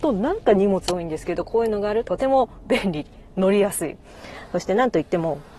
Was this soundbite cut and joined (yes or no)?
yes